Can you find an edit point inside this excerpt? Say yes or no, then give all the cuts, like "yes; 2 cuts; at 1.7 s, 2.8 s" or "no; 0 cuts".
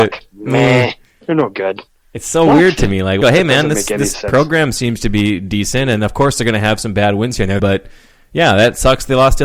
yes; 2 cuts; at 3.2 s, 7.6 s